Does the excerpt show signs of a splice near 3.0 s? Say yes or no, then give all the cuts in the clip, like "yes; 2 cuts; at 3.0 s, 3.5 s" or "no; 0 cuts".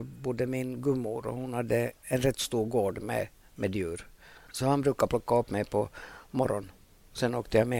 no; 1 cut; at 4.5 s